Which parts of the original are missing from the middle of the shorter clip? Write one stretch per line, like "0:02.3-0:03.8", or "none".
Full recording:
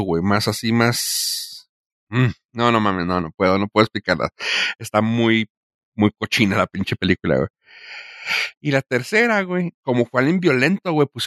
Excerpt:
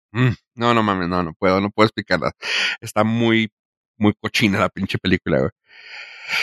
none